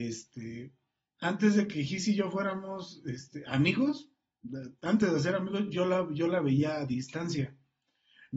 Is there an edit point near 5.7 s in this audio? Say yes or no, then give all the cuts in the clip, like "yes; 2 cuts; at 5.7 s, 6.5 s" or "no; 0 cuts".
no; 0 cuts